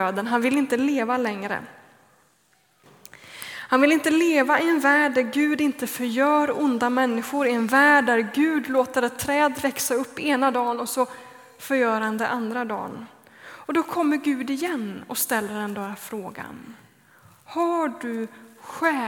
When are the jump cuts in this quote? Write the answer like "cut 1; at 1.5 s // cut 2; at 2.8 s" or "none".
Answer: none